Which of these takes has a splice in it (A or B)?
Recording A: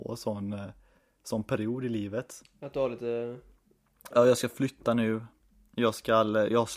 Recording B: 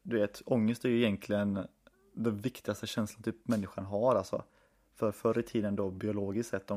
A